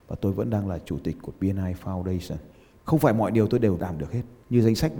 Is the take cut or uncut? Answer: cut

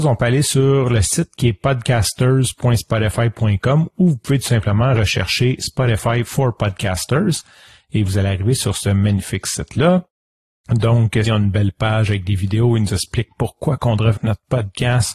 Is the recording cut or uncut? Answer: cut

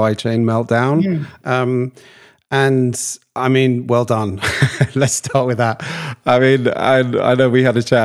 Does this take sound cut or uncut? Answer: cut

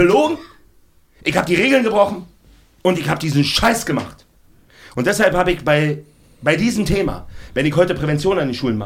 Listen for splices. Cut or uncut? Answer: uncut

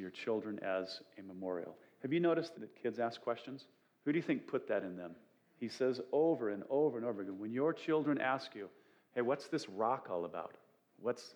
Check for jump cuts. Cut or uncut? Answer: cut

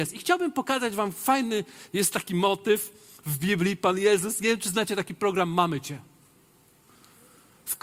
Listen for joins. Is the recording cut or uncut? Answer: uncut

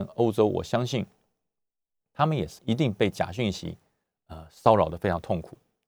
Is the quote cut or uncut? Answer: cut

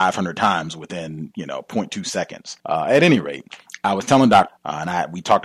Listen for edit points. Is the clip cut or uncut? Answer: cut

